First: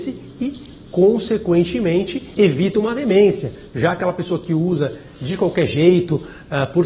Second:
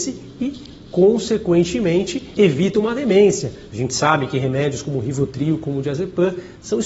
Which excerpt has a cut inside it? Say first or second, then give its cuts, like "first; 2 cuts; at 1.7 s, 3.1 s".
second; 1 cut; at 3.7 s